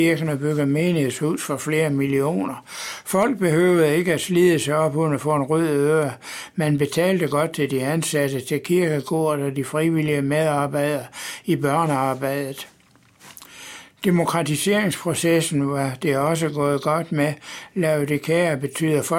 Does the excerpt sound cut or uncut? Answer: uncut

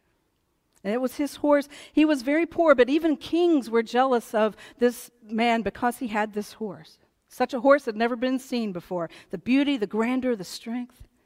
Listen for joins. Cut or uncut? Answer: uncut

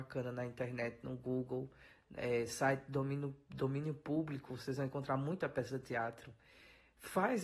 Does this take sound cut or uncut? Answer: uncut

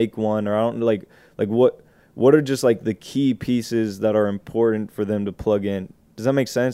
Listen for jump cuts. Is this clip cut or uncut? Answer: uncut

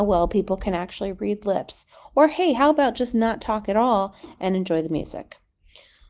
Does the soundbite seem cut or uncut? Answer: uncut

